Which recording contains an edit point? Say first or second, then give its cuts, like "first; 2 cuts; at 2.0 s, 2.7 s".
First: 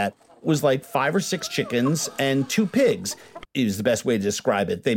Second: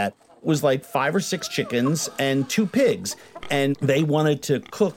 first; 1 cut; at 3.4 s